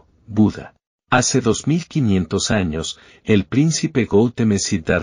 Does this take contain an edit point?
no; 0 cuts

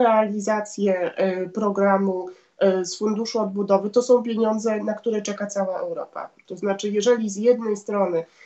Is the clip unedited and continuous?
no; 1 cut; at 6.5 s

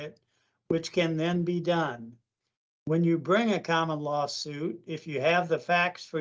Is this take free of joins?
yes; 0 cuts

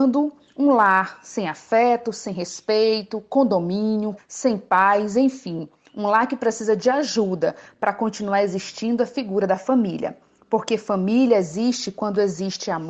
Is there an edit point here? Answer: yes; 1 cut; at 4.2 s

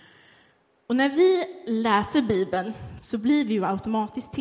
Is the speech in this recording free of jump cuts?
no; 1 cut; at 3.0 s

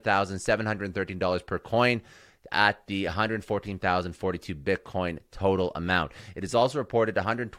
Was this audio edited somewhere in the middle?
no; 0 cuts

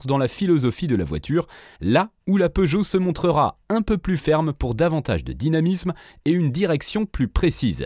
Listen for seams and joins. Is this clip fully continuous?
no; 1 cut; at 1.8 s

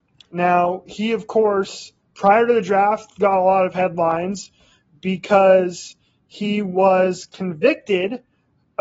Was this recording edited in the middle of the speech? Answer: no; 0 cuts

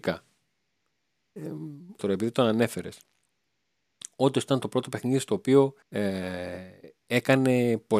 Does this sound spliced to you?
yes; 2 cuts; at 2.0 s, 5.8 s

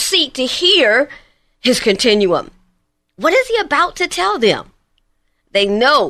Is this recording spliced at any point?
no; 0 cuts

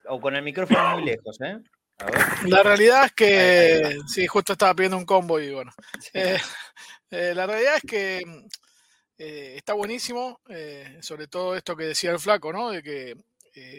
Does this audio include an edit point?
no; 0 cuts

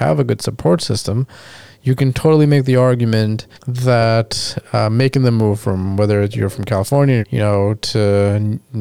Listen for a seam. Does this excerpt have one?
yes; 2 cuts; at 3.5 s, 7.2 s

